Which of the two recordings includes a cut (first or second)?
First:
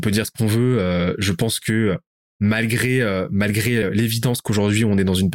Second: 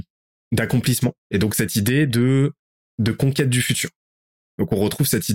second